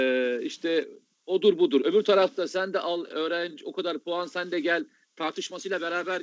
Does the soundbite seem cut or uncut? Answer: uncut